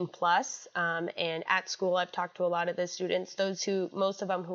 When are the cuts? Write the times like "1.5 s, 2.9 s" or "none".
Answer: none